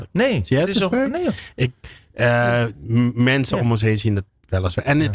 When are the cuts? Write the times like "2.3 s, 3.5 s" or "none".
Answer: none